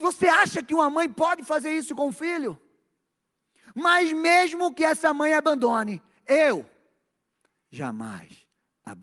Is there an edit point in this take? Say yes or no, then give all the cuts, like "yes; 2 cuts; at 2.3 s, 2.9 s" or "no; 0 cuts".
no; 0 cuts